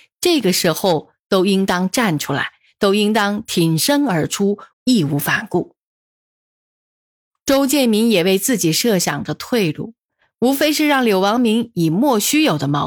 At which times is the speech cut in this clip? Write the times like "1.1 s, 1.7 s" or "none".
4.7 s